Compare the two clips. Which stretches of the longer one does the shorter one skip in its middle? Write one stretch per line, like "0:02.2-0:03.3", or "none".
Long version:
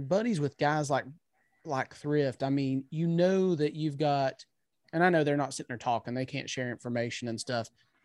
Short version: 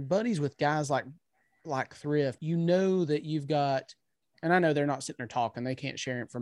0:02.4-0:02.9